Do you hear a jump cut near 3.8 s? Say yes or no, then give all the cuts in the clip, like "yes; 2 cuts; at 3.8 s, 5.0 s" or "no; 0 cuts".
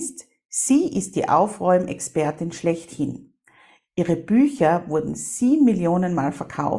no; 0 cuts